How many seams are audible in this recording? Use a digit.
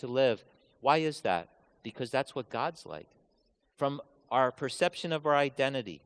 1